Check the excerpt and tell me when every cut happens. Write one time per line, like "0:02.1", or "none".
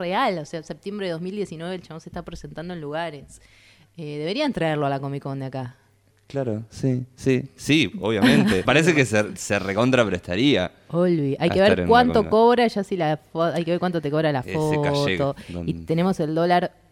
0:08.7